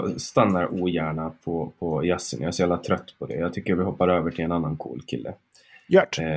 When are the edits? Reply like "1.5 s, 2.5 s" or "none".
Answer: none